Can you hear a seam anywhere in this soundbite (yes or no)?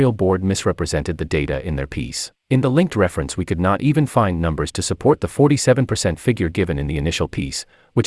yes